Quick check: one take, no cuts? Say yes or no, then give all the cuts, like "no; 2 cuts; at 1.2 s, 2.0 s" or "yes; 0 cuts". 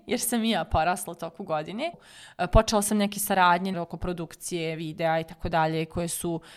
no; 2 cuts; at 1.9 s, 3.7 s